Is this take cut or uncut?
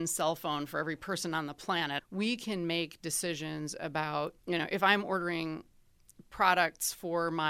cut